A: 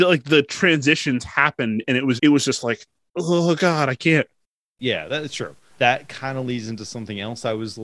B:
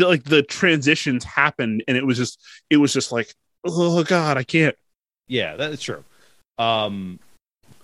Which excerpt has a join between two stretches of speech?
A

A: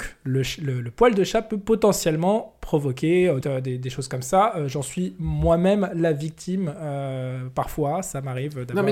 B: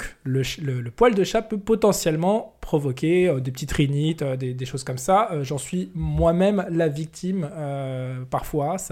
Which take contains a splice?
A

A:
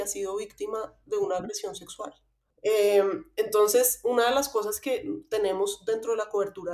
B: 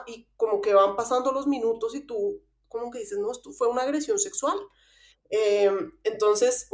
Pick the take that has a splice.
A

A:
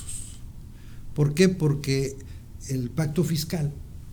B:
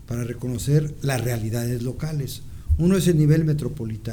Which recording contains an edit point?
A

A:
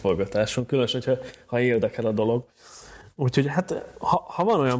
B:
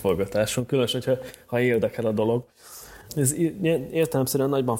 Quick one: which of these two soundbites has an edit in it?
B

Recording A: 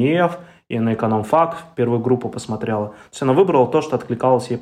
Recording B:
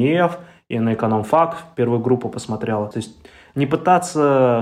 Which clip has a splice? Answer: B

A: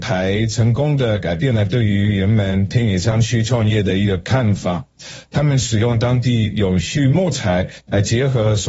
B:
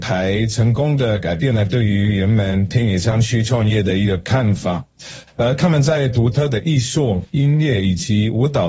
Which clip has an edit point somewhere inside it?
B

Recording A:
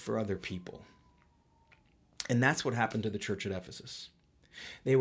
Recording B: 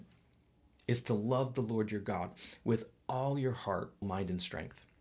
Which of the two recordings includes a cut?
B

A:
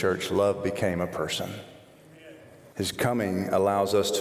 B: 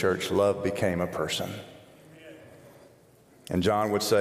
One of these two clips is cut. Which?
A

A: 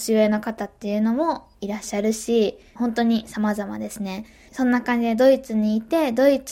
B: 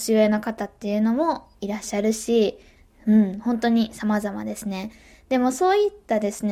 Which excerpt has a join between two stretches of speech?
A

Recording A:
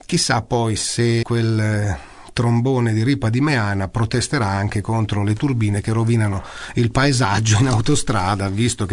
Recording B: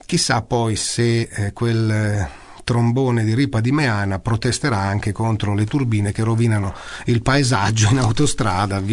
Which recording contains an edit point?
A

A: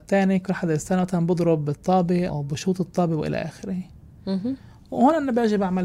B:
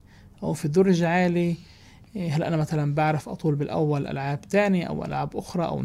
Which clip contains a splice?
A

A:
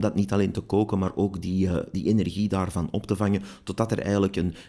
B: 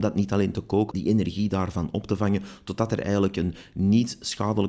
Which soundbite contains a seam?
B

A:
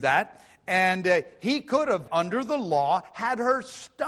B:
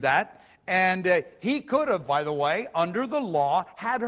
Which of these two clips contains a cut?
A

